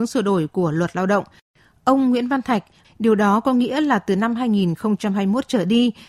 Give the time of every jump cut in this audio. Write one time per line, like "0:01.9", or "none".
0:02.8